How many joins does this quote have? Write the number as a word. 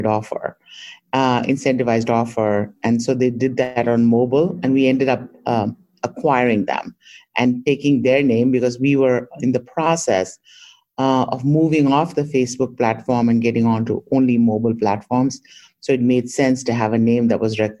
zero